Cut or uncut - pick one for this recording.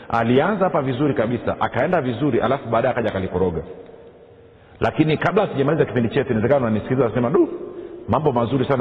uncut